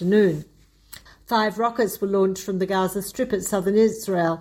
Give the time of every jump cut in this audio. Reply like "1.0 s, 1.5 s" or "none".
1.1 s